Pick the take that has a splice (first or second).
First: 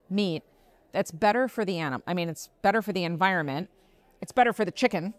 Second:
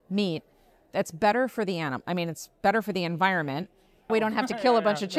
second